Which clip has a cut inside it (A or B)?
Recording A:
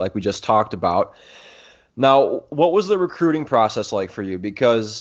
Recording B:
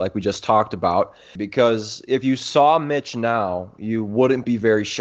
B